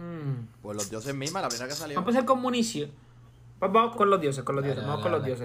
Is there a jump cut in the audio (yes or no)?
yes